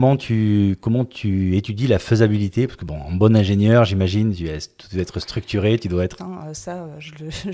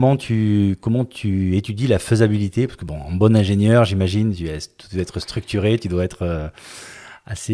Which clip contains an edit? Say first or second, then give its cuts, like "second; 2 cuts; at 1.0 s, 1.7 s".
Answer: first; 1 cut; at 6.2 s